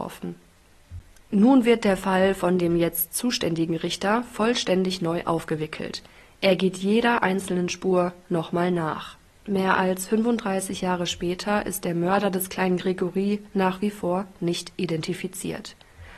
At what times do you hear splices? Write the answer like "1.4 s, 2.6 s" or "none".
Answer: 9.4 s